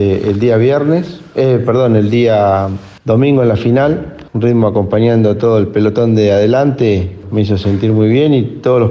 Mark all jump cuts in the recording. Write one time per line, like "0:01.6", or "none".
0:07.2